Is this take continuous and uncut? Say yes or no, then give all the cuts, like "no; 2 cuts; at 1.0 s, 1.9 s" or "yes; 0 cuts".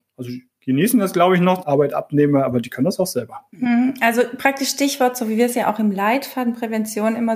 no; 1 cut; at 1.6 s